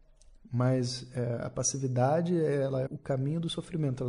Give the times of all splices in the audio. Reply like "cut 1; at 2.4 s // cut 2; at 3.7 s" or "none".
cut 1; at 2.9 s